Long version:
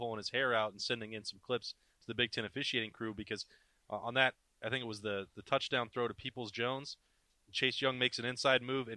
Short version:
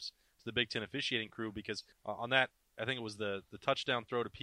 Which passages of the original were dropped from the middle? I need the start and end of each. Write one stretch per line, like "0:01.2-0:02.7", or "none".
0:03.5-0:03.8